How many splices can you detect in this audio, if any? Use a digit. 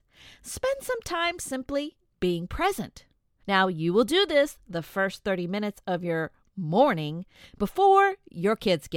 1